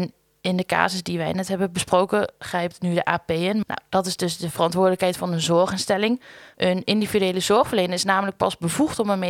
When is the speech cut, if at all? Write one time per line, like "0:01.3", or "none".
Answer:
0:03.6
0:06.5